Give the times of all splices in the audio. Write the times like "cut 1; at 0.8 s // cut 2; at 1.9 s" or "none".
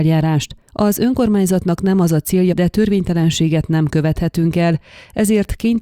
cut 1; at 2.5 s